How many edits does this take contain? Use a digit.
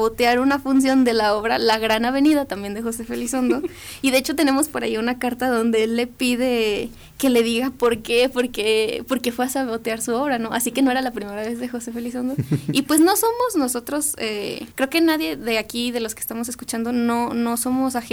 1